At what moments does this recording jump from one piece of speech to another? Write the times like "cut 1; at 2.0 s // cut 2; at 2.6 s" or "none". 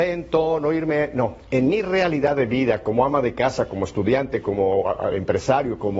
none